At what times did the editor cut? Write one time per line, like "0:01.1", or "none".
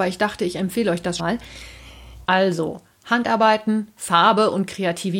0:01.2
0:02.2